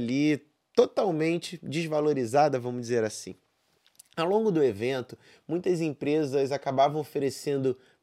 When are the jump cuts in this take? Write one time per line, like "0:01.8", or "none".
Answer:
none